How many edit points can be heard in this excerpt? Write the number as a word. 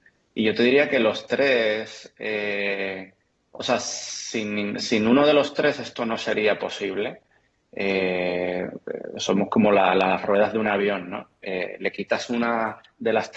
zero